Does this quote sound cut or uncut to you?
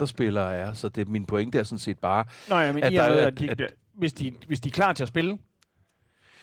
uncut